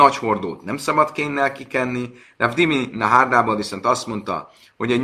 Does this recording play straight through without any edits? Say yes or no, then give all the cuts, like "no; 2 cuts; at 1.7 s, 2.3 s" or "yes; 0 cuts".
yes; 0 cuts